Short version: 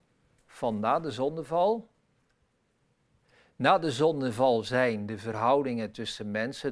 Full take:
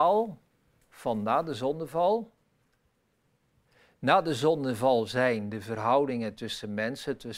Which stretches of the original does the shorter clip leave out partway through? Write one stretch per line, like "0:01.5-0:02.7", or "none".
none